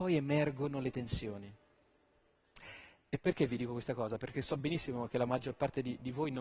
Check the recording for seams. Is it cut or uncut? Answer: uncut